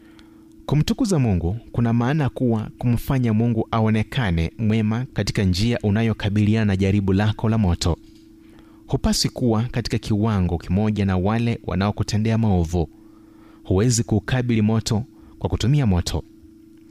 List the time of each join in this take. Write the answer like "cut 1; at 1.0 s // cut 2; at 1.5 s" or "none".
none